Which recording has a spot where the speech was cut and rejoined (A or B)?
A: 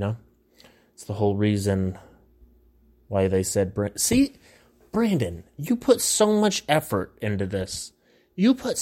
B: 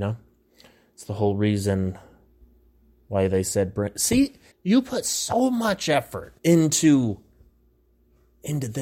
B